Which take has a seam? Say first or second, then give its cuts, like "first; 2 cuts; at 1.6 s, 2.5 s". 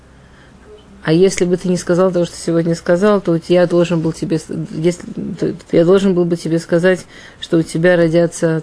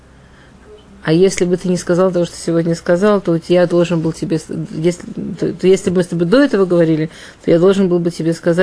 first; 1 cut; at 5.6 s